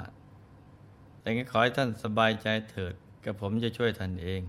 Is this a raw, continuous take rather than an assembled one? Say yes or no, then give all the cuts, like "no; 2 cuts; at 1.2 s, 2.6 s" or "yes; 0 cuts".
no; 1 cut; at 3.2 s